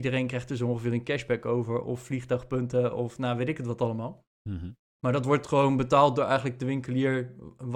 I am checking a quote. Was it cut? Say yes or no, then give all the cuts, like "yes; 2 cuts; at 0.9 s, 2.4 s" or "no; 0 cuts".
no; 0 cuts